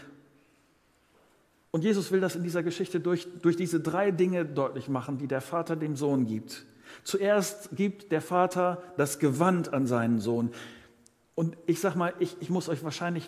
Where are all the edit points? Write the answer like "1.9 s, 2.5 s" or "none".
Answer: none